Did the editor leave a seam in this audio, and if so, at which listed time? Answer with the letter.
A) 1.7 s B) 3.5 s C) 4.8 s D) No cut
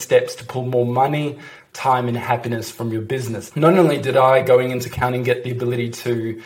B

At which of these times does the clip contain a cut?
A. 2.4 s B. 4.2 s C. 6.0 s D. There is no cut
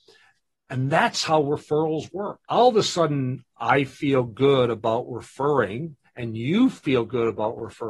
A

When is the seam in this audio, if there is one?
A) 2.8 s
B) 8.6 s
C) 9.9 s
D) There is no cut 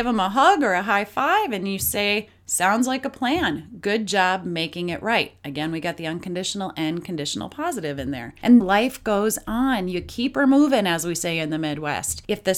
B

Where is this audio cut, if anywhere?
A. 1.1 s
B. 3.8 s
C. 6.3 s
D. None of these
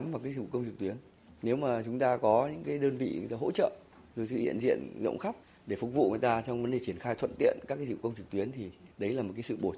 D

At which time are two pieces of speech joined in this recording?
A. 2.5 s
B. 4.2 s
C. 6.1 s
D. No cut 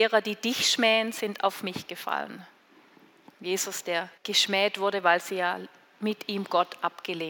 B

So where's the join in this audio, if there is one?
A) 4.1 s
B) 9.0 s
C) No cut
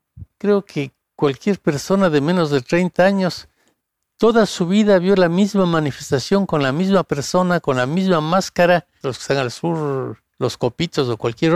B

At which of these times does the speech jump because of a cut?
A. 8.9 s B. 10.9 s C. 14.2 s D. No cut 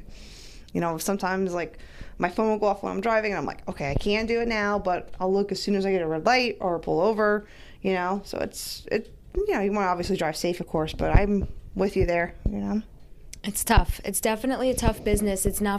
D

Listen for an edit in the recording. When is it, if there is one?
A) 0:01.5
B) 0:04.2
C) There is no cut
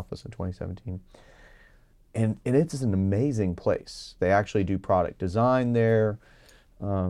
B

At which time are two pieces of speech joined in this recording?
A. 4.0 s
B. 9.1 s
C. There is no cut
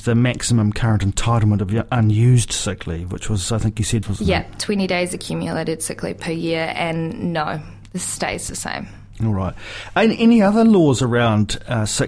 A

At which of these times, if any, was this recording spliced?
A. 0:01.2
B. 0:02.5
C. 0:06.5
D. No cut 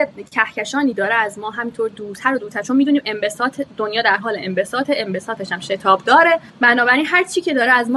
C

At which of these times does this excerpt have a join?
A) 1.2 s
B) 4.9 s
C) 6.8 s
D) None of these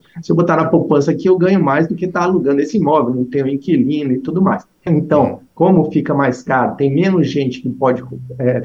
B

